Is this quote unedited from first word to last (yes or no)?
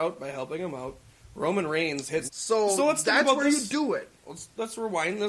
no